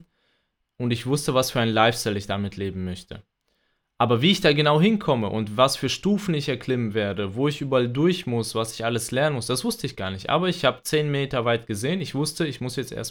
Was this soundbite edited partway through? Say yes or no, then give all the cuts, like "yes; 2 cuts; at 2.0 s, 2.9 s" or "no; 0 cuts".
no; 0 cuts